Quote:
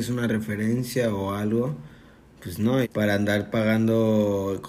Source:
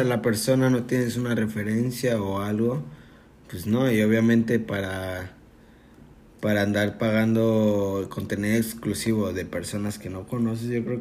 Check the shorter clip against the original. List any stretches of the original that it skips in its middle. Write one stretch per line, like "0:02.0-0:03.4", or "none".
0:03.9-0:06.3

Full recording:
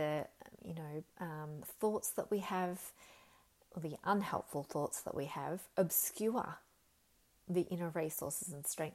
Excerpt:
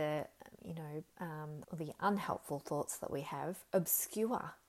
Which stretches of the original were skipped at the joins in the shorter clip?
0:01.6-0:03.7

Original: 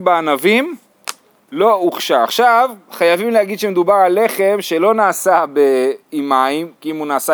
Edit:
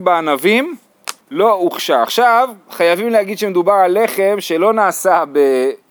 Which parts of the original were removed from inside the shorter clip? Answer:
0:01.2-0:01.4

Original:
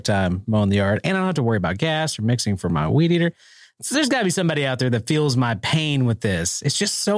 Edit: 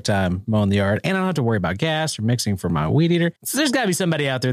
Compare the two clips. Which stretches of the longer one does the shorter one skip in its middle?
0:03.4-0:03.7

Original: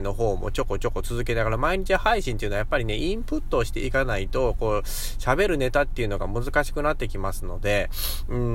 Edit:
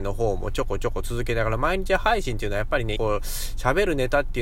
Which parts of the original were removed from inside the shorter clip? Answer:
0:03.0-0:04.6

